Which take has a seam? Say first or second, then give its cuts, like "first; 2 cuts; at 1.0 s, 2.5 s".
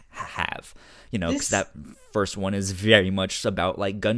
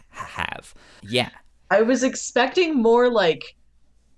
second; 1 cut; at 1.0 s